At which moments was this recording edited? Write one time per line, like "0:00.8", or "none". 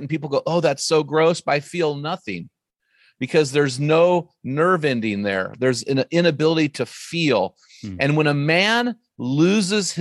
none